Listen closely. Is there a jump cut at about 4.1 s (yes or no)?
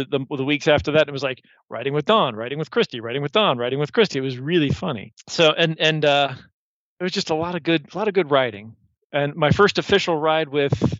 no